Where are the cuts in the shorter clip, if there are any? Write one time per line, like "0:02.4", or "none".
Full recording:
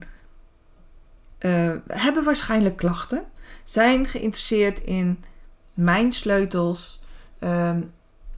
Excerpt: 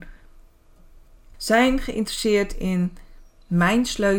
0:01.3

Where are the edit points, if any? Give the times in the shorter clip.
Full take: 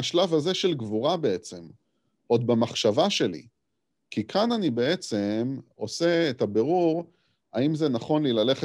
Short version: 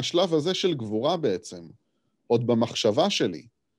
none

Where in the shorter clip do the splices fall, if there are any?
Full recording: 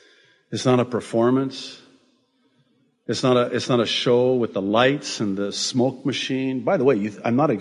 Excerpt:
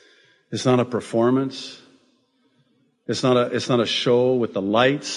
none

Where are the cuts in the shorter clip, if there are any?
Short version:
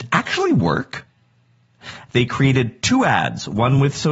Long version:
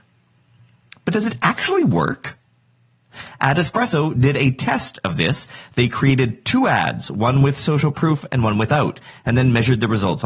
0:02.1

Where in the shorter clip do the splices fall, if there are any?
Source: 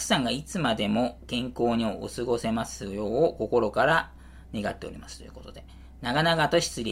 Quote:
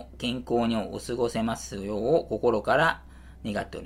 none

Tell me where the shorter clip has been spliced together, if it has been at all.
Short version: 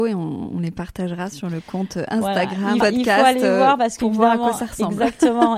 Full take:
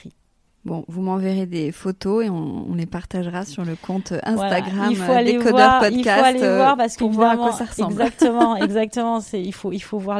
0:02.8

